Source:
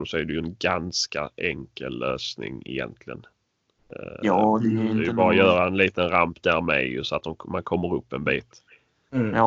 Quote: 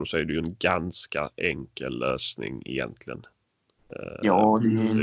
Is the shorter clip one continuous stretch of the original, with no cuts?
yes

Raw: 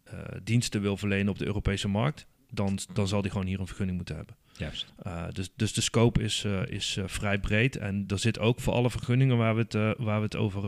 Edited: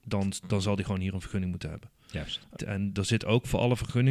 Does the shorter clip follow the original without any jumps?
no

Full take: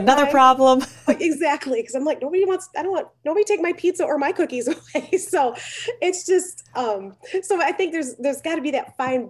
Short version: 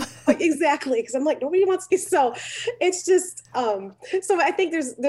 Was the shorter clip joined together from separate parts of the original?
yes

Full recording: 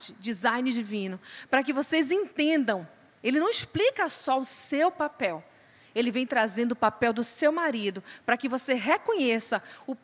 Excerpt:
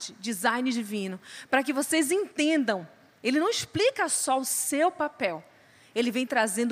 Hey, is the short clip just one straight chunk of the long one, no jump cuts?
yes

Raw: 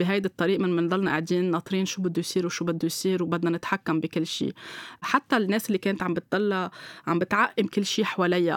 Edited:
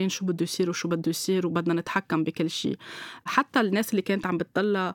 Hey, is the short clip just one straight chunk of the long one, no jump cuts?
yes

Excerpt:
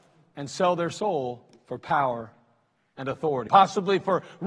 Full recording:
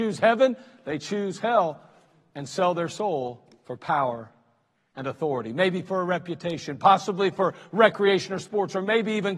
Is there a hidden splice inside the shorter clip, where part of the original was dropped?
yes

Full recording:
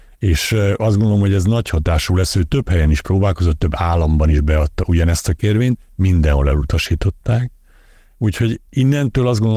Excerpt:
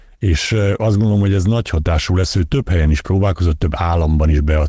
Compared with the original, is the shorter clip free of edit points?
yes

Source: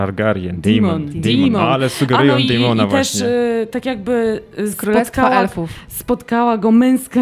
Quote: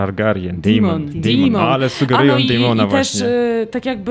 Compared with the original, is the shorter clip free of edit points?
yes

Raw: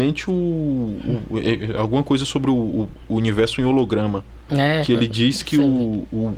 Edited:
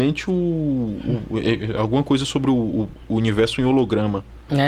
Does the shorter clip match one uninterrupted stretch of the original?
yes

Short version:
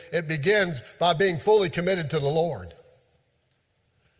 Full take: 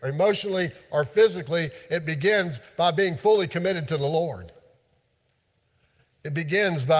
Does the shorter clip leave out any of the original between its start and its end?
no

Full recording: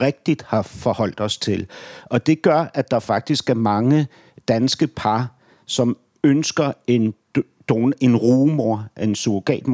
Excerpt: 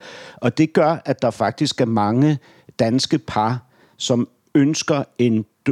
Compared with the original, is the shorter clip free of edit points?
yes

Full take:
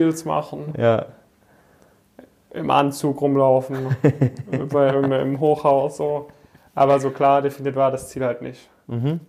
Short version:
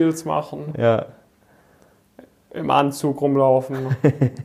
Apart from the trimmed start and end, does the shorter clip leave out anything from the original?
no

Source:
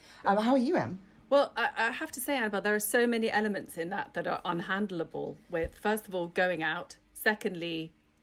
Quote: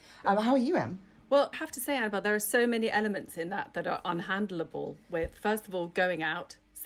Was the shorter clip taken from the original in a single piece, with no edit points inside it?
no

